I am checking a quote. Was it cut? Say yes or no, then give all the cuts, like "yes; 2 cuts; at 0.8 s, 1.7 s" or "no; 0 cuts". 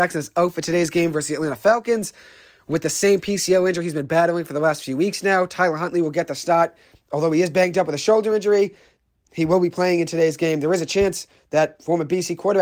no; 0 cuts